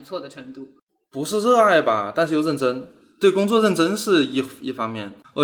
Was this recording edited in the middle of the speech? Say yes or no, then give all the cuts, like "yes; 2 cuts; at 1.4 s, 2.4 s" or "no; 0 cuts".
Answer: no; 0 cuts